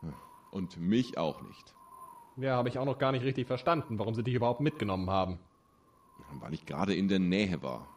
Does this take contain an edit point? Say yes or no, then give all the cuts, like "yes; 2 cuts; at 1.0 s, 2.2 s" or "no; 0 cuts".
no; 0 cuts